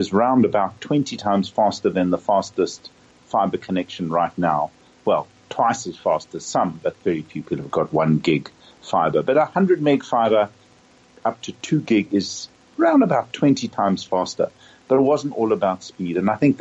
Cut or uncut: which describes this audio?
uncut